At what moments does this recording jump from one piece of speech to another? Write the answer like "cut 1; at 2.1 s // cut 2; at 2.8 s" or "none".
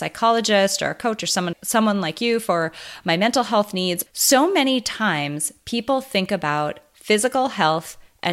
cut 1; at 1.5 s // cut 2; at 4.1 s

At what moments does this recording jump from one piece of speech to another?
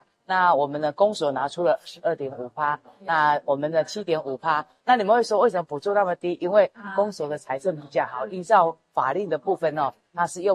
none

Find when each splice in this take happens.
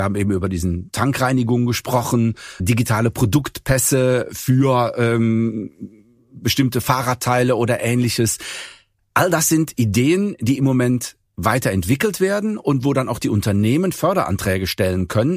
cut 1; at 2.6 s

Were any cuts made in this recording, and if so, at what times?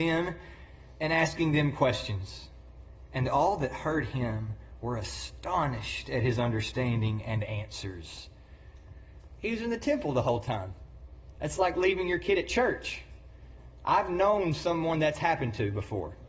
none

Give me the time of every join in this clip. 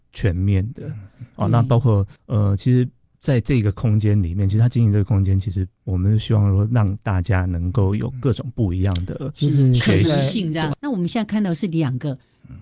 cut 1; at 2.2 s // cut 2; at 10.7 s

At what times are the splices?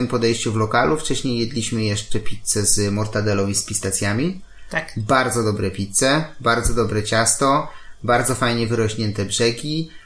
none

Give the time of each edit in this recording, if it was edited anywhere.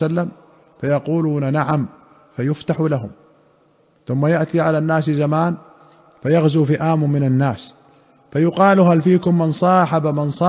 none

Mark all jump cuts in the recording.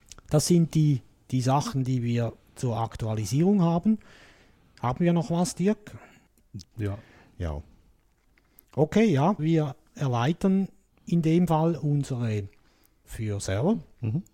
cut 1; at 6.6 s // cut 2; at 9.4 s // cut 3; at 13.0 s

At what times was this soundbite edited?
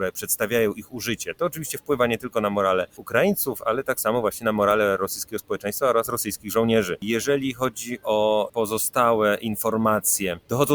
none

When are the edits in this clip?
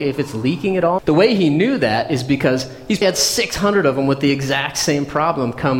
cut 1; at 1.0 s // cut 2; at 3.0 s

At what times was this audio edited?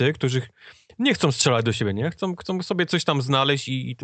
none

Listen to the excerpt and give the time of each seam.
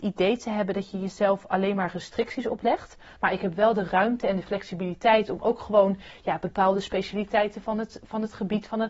cut 1; at 3.2 s

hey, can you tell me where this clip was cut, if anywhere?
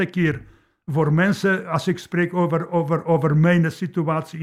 none

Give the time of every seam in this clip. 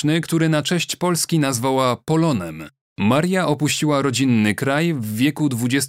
cut 1; at 2.8 s

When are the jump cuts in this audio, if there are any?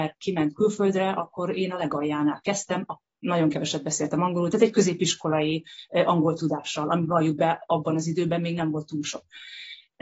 none

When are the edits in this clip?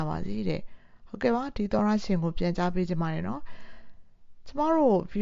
none

